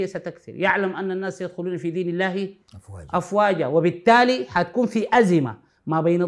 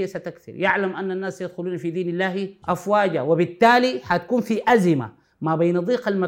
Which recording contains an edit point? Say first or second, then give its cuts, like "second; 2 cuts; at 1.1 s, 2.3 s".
second; 1 cut; at 2.6 s